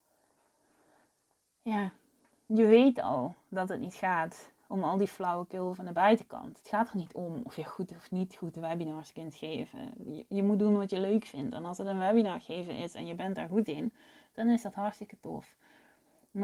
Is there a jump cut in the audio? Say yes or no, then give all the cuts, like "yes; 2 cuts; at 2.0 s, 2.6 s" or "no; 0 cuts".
no; 0 cuts